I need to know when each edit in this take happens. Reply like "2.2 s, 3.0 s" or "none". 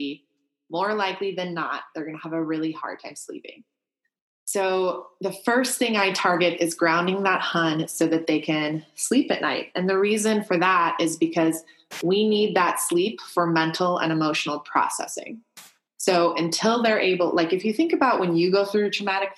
none